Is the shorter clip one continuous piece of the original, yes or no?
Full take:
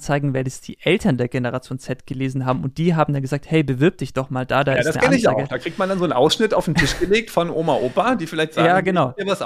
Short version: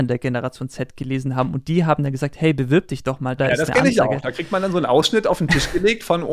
no